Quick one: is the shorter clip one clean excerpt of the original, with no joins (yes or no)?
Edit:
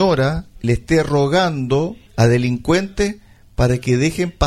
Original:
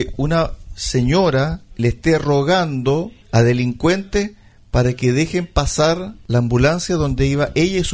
yes